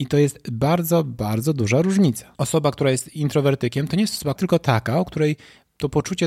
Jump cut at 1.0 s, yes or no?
no